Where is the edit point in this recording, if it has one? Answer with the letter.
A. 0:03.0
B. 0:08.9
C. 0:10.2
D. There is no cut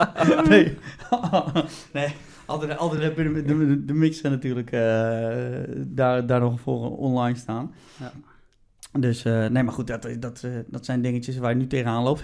D